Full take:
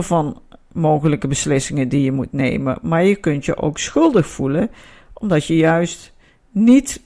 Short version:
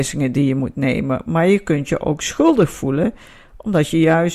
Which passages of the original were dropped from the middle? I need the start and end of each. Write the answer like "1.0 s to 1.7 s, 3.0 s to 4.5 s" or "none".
none